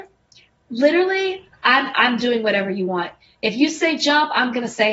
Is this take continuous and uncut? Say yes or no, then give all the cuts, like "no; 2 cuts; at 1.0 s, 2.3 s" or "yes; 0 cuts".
no; 1 cut; at 1.9 s